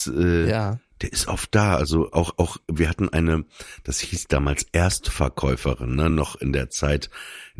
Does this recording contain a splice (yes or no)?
no